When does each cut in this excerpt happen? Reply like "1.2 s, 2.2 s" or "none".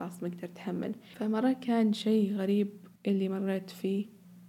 3.0 s